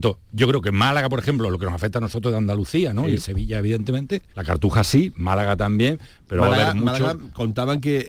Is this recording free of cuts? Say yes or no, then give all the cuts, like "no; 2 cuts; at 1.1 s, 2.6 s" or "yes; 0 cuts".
no; 1 cut; at 4.3 s